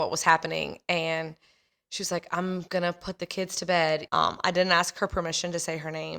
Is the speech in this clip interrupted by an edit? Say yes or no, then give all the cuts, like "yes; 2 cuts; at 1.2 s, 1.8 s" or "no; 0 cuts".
yes; 1 cut; at 4.1 s